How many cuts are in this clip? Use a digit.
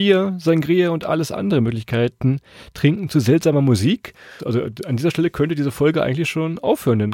1